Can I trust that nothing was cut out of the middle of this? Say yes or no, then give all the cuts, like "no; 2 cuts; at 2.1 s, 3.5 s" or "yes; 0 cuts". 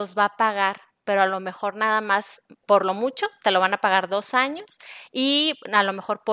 yes; 0 cuts